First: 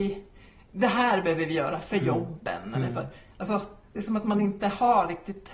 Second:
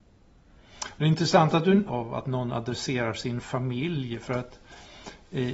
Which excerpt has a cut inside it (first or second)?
second